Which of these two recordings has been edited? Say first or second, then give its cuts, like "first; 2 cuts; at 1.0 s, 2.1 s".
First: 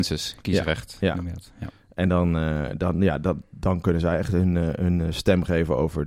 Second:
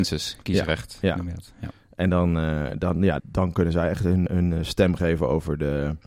second; 2 cuts; at 3.2 s, 4.3 s